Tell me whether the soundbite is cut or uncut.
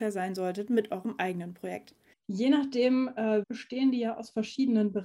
cut